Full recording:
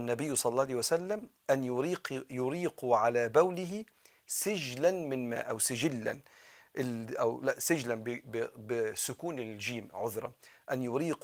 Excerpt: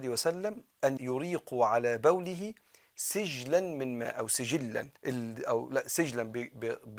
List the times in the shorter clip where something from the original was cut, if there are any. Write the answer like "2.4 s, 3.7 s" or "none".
1.0 s, 5.0 s